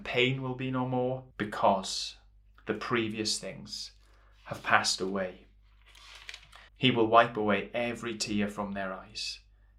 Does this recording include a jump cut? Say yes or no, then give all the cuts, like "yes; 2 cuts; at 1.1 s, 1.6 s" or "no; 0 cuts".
yes; 2 cuts; at 1.3 s, 6.7 s